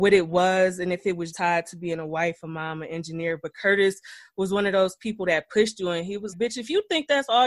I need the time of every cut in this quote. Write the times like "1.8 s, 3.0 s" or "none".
1.3 s, 6.3 s